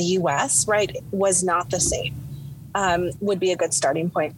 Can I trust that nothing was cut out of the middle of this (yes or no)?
no